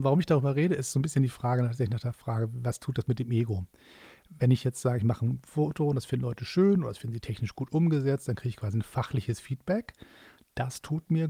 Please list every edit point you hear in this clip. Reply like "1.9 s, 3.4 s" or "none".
none